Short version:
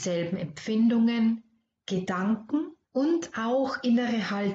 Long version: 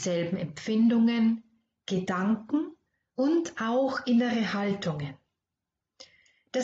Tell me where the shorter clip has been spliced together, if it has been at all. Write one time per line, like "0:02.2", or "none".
0:02.8